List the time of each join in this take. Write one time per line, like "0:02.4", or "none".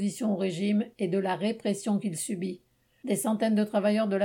none